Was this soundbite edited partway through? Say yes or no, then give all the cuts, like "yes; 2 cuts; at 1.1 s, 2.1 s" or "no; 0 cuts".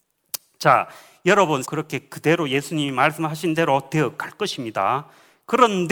yes; 1 cut; at 1.6 s